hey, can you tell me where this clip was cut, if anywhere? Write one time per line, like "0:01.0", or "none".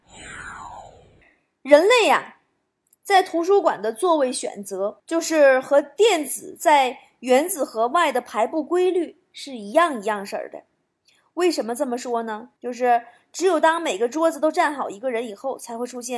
0:12.6